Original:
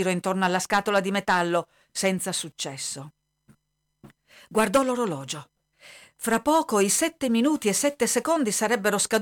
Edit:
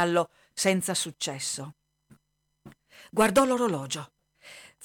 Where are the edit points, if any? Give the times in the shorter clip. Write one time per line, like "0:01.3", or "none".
none